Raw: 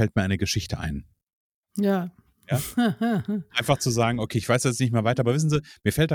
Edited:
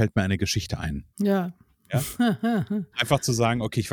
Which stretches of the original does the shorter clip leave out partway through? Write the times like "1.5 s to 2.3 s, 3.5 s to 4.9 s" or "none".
1.1 s to 1.7 s